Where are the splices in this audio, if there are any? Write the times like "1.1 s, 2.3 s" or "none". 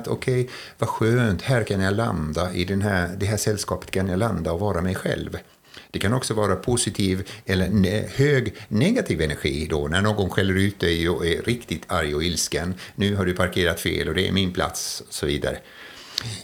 none

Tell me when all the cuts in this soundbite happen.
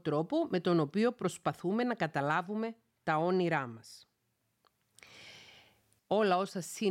6.0 s

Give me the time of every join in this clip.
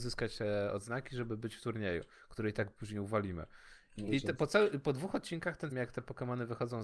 4.1 s, 5.7 s

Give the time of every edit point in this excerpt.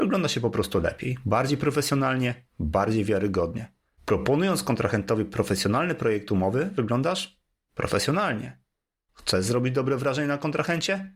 4.0 s

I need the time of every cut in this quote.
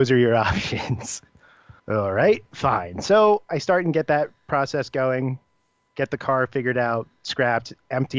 1.8 s

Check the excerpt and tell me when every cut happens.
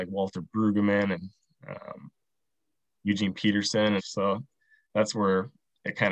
4.0 s

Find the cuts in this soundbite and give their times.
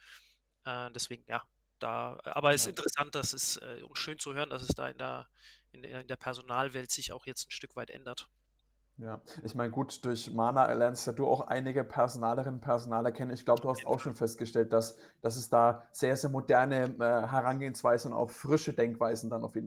none

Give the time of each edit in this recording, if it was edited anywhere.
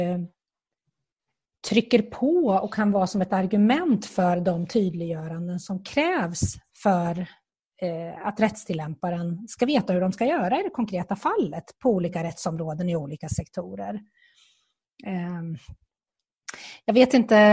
none

